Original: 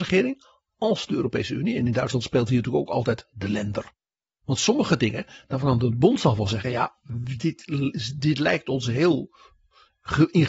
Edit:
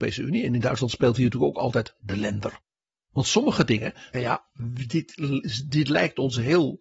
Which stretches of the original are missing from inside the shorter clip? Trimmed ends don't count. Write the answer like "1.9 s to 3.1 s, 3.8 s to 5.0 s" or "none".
5.5 s to 6.6 s